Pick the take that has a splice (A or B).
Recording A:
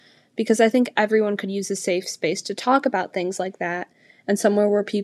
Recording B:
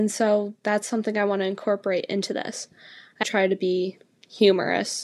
B